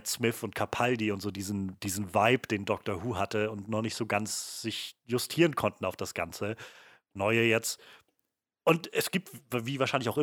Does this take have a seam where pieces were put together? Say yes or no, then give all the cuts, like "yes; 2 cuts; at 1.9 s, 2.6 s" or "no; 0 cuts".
no; 0 cuts